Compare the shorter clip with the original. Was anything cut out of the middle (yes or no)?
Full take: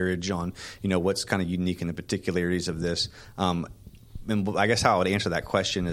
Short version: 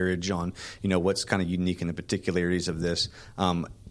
no